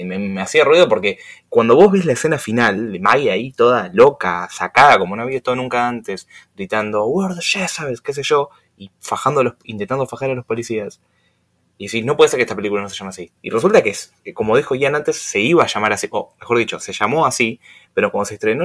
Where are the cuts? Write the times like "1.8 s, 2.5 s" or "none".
13.4 s